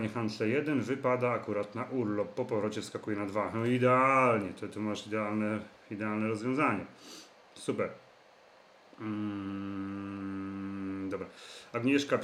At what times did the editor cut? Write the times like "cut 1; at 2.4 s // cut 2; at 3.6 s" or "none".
none